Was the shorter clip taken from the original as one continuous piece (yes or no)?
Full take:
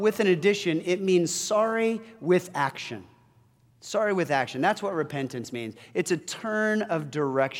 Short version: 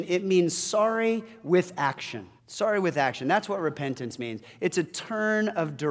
no